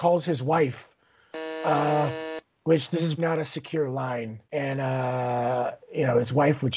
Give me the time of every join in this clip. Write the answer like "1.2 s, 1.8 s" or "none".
3.2 s, 4.4 s